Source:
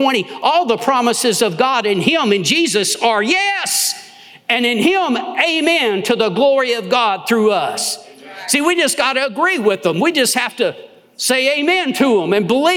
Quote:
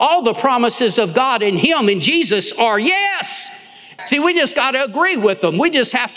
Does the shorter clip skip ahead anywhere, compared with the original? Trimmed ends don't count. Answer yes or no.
yes